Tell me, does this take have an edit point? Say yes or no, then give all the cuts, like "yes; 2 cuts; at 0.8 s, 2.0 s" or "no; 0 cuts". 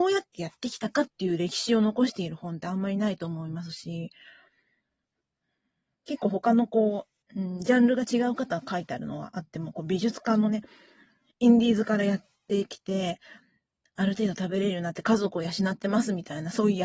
yes; 2 cuts; at 7.2 s, 11.3 s